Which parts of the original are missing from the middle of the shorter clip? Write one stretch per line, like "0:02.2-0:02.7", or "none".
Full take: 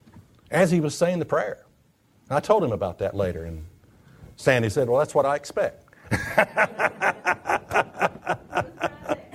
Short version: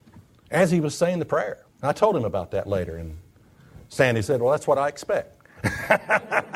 0:01.7-0:02.2